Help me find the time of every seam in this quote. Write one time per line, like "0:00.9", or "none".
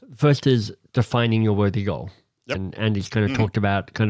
0:02.5